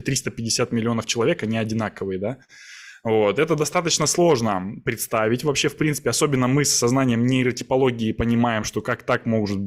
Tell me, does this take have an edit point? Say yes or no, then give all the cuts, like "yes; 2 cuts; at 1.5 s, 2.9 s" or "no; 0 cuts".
no; 0 cuts